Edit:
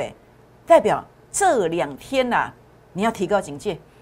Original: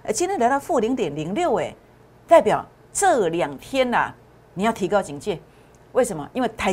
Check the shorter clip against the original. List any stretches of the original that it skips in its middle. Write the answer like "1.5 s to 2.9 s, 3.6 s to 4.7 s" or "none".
none